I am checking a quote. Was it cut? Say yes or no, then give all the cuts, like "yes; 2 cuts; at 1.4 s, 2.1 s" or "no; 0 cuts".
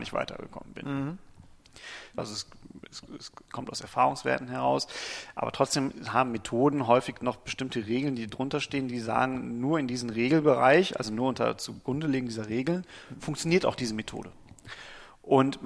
yes; 1 cut; at 2.2 s